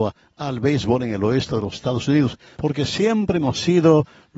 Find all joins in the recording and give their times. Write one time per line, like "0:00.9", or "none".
0:02.6